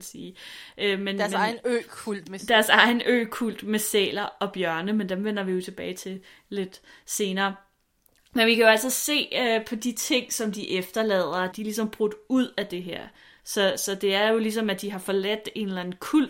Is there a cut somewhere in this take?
yes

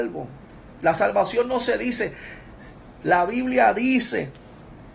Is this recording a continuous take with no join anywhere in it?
no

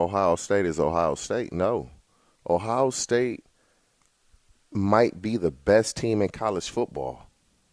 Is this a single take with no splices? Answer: yes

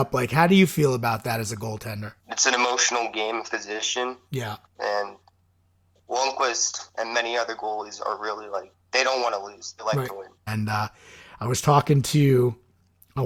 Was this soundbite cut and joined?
yes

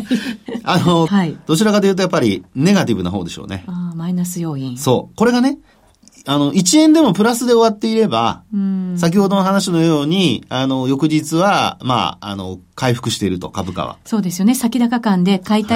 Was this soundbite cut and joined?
yes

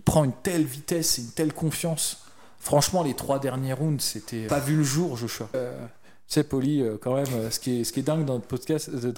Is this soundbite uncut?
no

